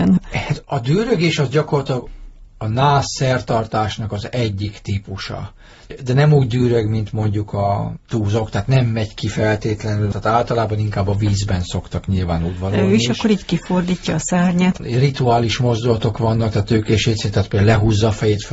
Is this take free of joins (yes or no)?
yes